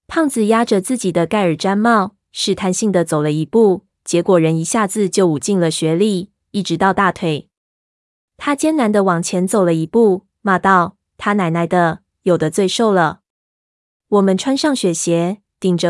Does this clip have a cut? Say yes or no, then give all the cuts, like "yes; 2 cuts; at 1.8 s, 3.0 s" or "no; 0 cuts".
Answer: no; 0 cuts